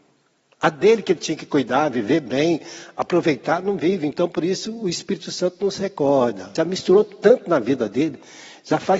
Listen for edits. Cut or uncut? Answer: cut